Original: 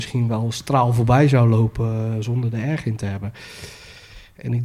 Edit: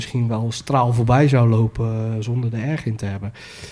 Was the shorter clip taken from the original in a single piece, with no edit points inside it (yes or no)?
yes